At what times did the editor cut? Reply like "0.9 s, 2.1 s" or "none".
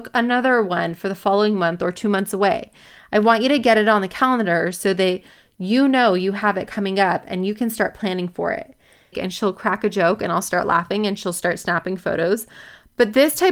9.1 s